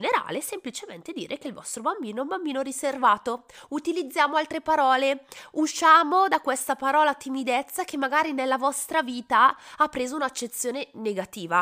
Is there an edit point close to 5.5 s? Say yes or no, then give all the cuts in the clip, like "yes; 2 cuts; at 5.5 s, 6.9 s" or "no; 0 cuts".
no; 0 cuts